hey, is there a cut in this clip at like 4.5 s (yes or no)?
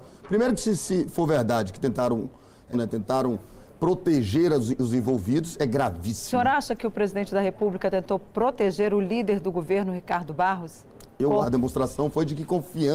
no